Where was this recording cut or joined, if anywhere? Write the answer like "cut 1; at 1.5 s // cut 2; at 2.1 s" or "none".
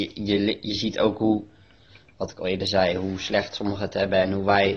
none